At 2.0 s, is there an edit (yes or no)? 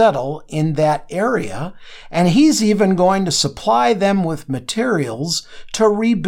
no